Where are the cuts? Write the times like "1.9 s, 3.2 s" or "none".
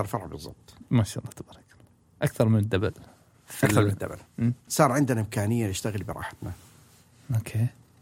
4.7 s